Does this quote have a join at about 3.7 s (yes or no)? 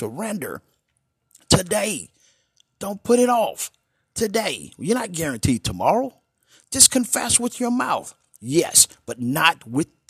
no